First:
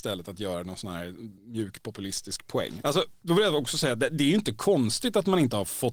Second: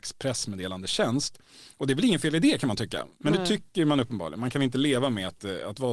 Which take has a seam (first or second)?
first